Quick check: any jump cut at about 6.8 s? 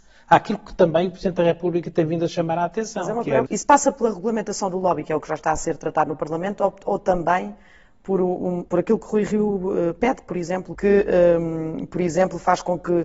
no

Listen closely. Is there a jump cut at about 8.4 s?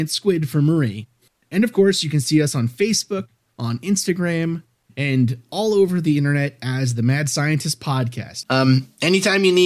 yes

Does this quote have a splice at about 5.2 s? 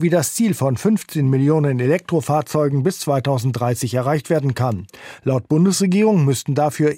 no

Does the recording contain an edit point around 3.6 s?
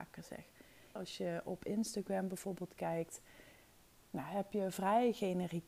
no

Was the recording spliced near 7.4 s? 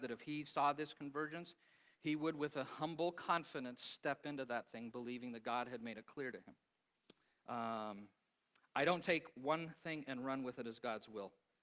yes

